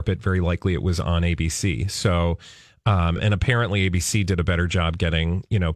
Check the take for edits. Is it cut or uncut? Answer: uncut